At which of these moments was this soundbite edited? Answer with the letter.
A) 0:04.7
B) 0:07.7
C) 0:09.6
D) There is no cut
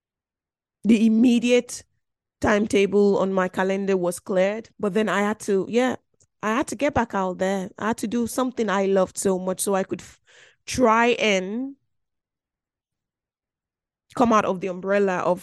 A